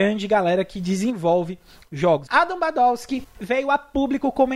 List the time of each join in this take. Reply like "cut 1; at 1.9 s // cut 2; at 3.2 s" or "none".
cut 1; at 2.3 s // cut 2; at 3.3 s